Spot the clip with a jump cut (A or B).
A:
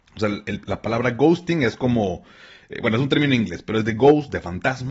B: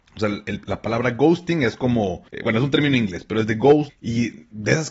B